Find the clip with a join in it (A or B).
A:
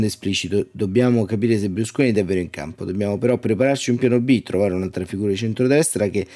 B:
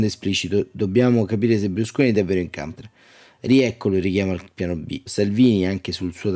B